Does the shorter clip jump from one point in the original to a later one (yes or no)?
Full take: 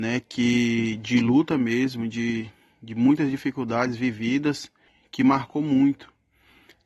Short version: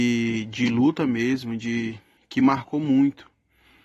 yes